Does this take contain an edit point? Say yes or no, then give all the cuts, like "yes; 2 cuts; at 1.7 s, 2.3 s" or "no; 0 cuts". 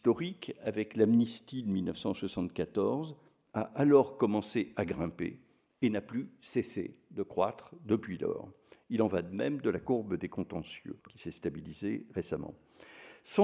yes; 1 cut; at 11.0 s